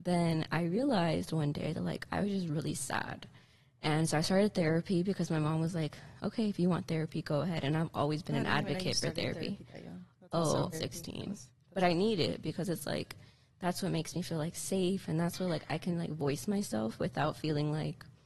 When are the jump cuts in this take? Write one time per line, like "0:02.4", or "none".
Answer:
0:10.7